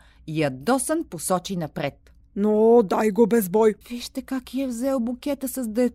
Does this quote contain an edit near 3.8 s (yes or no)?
yes